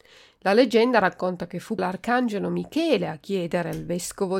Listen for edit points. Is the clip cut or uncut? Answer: cut